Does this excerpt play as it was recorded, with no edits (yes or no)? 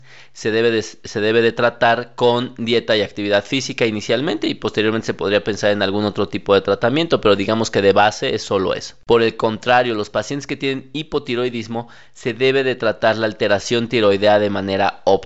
yes